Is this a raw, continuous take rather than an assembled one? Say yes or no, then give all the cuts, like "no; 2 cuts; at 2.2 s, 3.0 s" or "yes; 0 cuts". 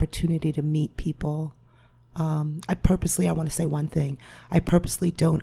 yes; 0 cuts